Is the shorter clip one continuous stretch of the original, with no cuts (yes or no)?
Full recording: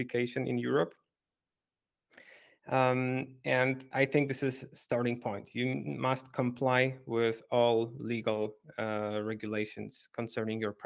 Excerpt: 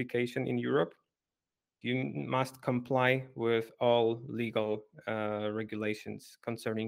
no